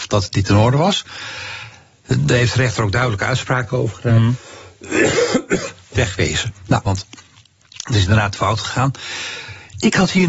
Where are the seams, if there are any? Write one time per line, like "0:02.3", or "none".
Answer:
0:06.9